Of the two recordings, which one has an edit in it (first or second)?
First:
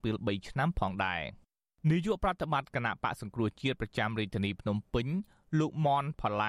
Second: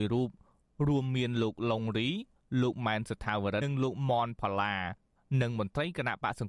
second